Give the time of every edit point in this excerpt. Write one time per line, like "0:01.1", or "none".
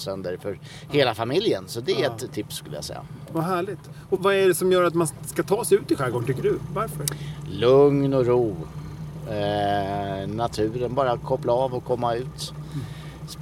0:04.2